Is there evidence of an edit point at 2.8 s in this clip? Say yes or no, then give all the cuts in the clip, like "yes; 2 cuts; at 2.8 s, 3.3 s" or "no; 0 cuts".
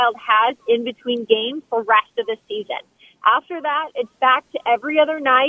no; 0 cuts